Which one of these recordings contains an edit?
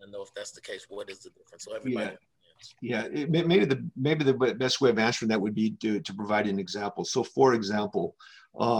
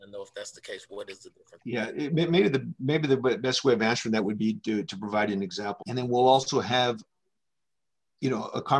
second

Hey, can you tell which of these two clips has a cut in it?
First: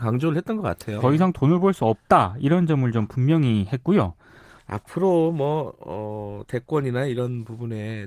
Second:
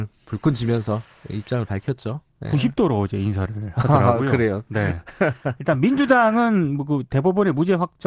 first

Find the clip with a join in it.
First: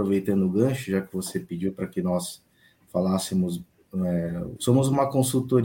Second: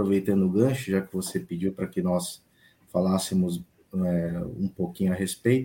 first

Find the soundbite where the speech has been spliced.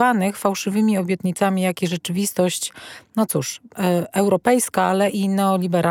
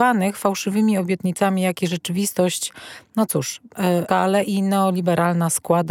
second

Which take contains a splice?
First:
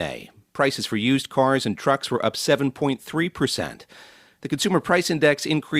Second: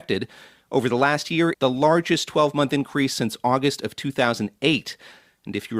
second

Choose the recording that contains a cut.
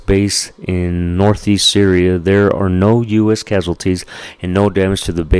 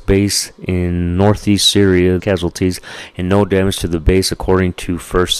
second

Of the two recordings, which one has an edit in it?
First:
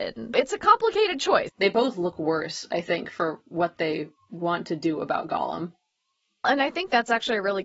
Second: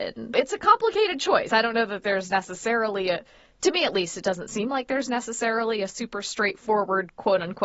first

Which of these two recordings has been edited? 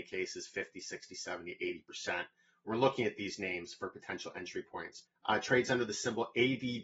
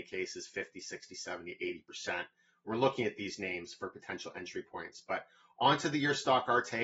first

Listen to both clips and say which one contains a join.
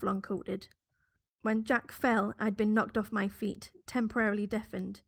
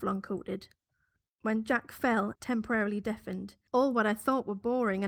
second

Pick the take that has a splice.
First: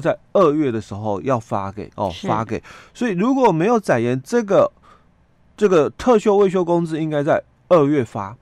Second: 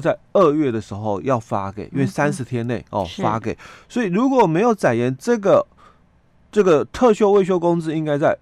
first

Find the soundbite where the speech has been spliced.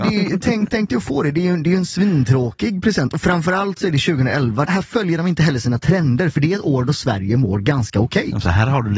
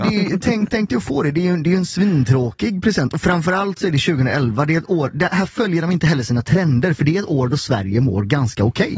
first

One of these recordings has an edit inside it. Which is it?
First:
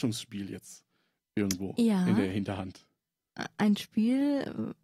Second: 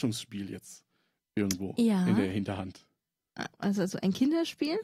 second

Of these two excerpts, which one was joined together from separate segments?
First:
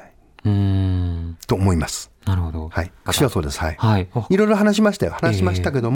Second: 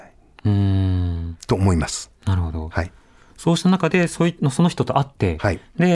first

